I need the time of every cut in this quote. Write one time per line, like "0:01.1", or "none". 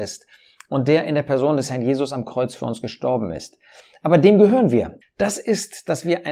0:05.0